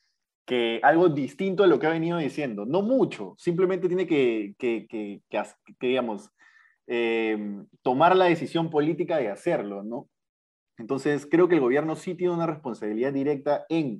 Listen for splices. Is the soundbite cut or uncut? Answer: uncut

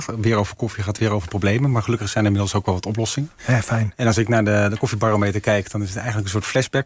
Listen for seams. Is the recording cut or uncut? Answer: uncut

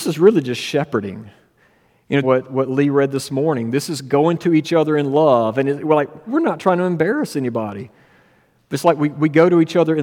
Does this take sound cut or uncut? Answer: cut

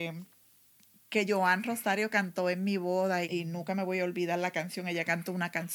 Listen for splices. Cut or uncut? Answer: cut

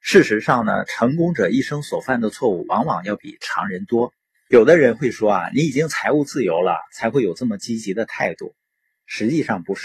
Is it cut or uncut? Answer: cut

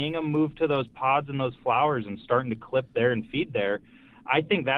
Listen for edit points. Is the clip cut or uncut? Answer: uncut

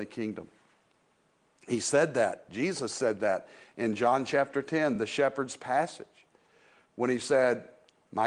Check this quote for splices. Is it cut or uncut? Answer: uncut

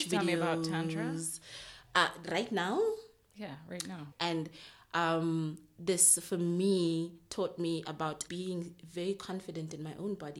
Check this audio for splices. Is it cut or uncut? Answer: cut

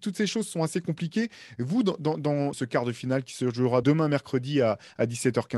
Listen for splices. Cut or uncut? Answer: cut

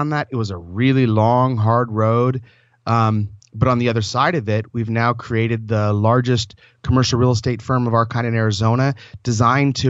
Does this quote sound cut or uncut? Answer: uncut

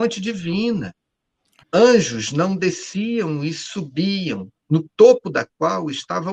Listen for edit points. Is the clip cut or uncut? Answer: cut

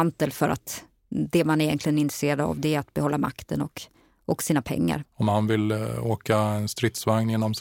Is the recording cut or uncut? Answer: cut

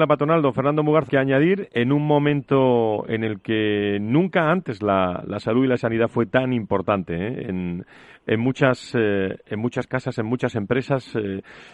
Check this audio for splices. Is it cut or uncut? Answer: cut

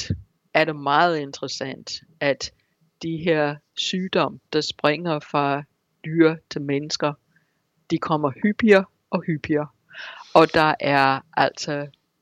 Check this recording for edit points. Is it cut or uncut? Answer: uncut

